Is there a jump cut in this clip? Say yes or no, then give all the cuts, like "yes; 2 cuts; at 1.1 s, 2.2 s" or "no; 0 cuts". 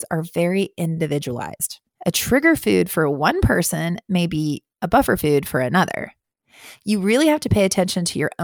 no; 0 cuts